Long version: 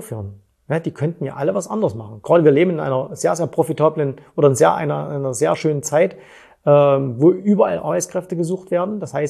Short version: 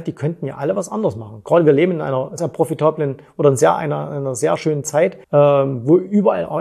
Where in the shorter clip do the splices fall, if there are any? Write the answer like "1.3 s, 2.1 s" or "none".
2.4 s, 5.2 s